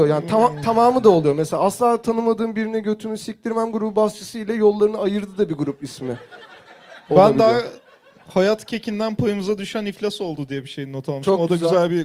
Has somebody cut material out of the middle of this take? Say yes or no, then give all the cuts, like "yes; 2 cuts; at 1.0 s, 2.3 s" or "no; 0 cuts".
no; 0 cuts